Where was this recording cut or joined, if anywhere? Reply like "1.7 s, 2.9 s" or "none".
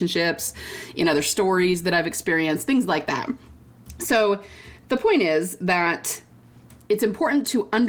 none